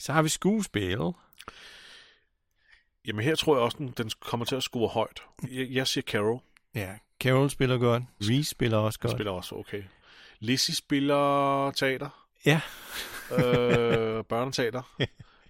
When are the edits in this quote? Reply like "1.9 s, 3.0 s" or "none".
5.4 s, 8.2 s